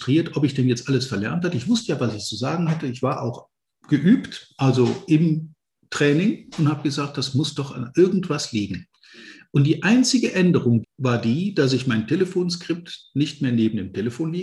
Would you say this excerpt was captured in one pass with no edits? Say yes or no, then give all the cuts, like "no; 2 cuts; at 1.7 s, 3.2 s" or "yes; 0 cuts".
no; 1 cut; at 10.8 s